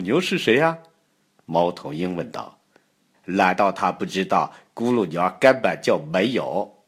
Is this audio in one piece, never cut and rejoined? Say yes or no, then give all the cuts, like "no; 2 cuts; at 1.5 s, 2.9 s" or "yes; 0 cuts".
no; 1 cut; at 3.1 s